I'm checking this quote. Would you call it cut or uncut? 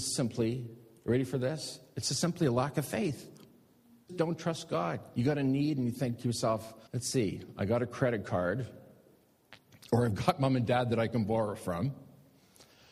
cut